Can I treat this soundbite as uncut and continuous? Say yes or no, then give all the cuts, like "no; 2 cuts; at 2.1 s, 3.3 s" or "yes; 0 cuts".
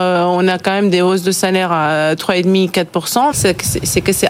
no; 1 cut; at 3.3 s